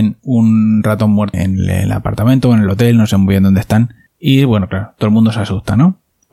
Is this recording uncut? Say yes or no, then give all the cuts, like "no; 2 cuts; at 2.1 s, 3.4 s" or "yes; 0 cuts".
no; 1 cut; at 1.3 s